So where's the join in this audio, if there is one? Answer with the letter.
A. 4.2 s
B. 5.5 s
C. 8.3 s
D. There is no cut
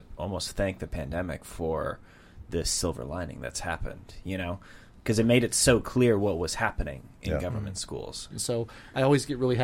C